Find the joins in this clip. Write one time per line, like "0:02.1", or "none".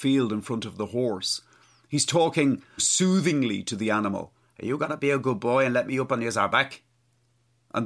0:02.8
0:04.4